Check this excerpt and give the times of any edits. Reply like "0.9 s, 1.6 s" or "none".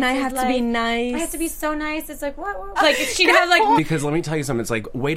2.8 s, 3.8 s